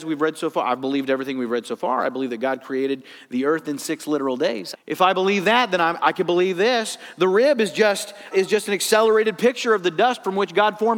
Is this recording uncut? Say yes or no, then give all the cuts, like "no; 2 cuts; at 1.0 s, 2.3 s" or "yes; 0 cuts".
no; 2 cuts; at 4.7 s, 8.3 s